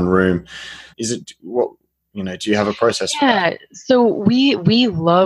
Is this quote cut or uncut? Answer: cut